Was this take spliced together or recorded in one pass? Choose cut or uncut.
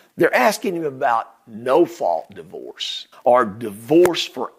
cut